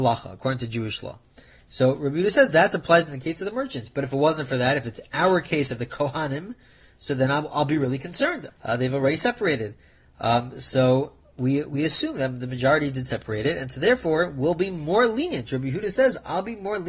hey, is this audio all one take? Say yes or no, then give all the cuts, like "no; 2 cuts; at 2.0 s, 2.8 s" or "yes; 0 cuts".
no; 1 cut; at 8.5 s